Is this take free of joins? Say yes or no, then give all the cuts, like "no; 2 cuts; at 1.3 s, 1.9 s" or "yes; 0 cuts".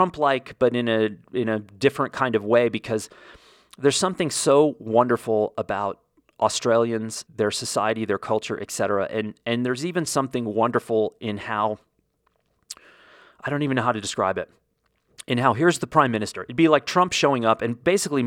no; 1 cut; at 7.3 s